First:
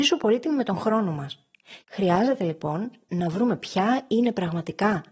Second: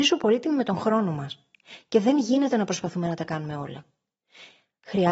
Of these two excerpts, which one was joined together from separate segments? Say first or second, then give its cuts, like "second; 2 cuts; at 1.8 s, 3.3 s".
first; 1 cut; at 1.8 s